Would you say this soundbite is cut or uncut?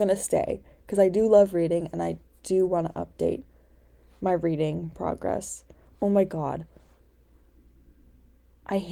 uncut